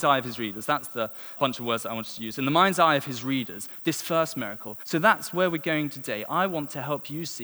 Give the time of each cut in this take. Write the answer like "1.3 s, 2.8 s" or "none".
1.4 s, 4.8 s